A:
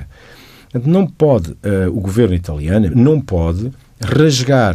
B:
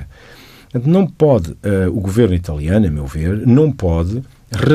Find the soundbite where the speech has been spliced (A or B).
A